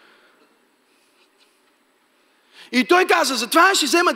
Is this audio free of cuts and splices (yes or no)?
yes